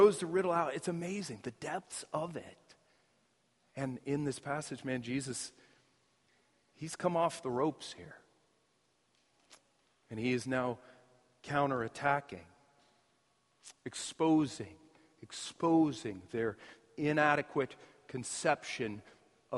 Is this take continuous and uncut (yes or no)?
yes